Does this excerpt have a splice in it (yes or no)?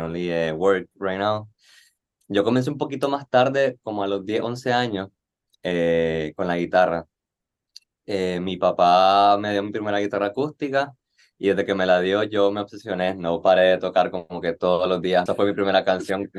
yes